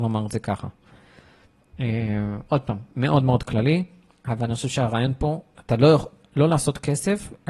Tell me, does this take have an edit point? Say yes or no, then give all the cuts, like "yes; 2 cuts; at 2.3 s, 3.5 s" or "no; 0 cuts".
no; 0 cuts